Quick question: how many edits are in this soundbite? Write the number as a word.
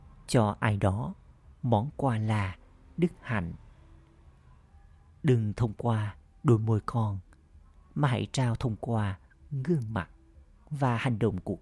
zero